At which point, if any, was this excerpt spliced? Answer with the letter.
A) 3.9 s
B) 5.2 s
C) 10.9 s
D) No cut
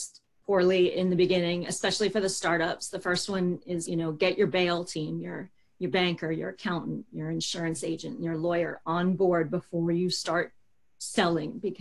A